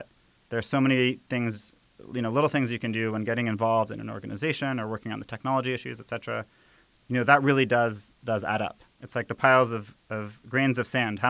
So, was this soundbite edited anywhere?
no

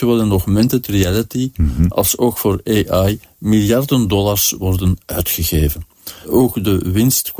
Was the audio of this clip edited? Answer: yes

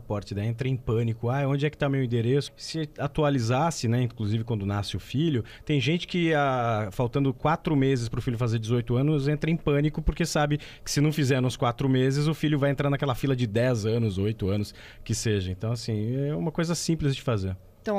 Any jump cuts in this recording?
yes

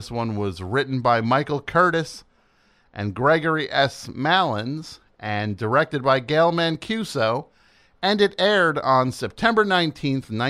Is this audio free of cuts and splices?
yes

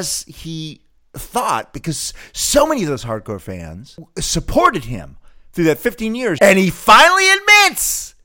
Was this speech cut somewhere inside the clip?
yes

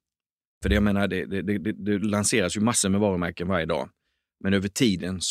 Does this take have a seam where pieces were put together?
no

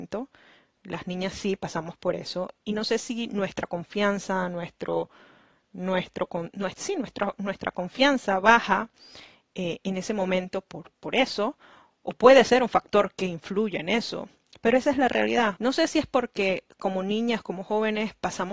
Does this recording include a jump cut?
yes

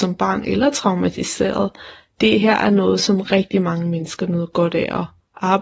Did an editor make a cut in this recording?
no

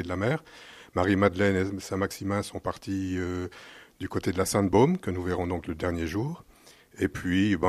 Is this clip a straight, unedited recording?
yes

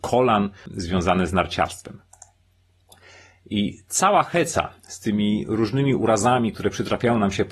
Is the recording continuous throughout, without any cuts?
yes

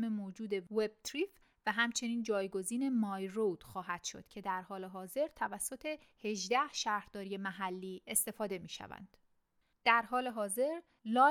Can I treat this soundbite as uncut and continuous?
no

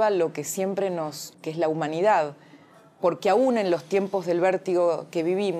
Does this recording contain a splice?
yes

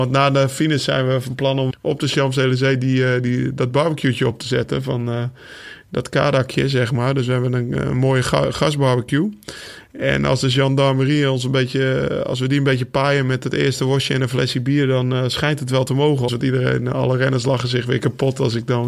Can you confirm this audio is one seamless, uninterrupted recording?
no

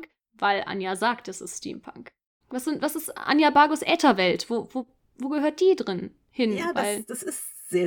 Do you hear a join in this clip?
yes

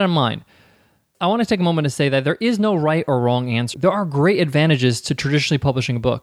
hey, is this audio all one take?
no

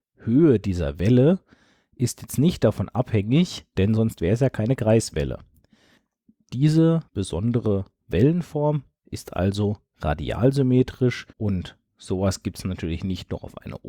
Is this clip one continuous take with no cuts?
no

